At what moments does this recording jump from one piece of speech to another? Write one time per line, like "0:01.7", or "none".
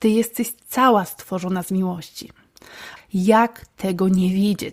0:03.0